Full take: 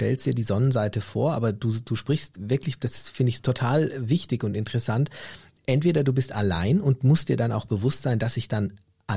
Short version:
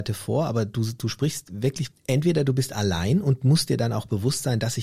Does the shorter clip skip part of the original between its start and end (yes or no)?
yes